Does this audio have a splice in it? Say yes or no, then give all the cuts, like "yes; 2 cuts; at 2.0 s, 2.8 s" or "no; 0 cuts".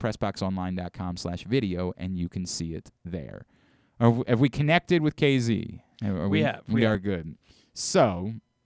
no; 0 cuts